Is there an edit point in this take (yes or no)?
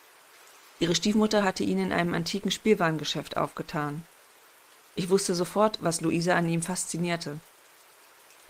no